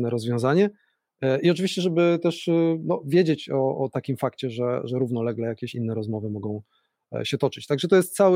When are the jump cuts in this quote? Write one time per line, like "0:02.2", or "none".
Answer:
none